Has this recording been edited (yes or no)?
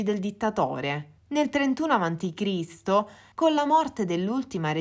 yes